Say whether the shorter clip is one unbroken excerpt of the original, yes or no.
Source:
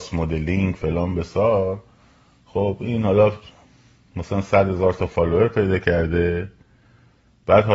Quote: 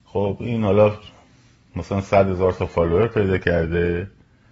yes